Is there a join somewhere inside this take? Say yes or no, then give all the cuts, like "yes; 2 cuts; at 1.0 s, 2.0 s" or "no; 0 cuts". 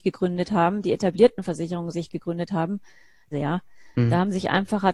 yes; 1 cut; at 3.3 s